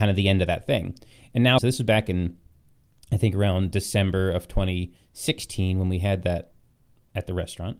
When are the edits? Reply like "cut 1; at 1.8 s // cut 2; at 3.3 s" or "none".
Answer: cut 1; at 1.6 s